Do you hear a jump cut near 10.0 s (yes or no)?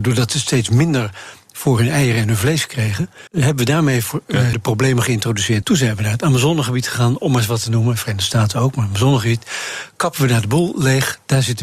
no